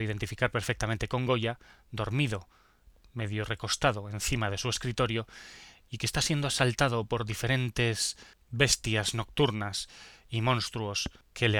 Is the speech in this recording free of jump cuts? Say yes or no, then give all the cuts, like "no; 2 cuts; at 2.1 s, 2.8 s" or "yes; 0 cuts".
yes; 0 cuts